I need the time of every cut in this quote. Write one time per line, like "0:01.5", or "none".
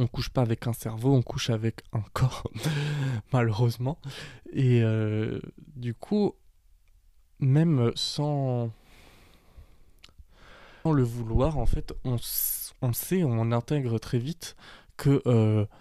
0:10.9